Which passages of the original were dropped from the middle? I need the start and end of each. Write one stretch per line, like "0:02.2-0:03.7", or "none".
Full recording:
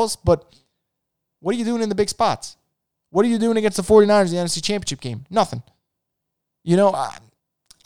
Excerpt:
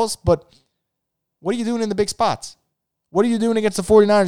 none